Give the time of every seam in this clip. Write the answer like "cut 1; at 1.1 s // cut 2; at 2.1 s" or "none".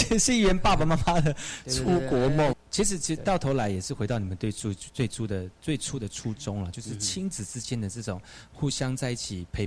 cut 1; at 2.5 s